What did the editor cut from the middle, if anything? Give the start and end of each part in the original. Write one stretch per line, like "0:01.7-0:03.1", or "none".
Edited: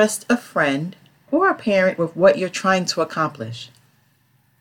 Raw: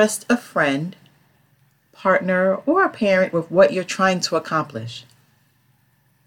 0:01.3-0:02.6